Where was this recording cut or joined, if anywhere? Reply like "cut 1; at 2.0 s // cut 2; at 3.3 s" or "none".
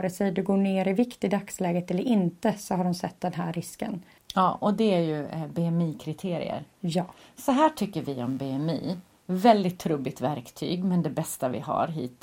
cut 1; at 4.2 s